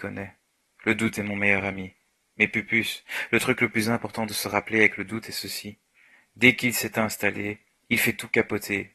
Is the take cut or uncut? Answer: uncut